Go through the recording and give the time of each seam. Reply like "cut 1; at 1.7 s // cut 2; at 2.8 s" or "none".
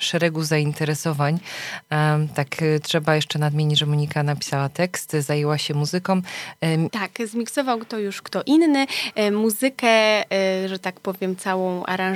cut 1; at 6.9 s